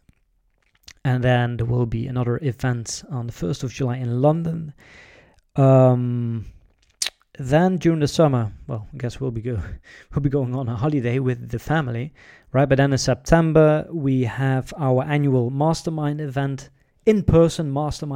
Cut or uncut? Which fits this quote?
uncut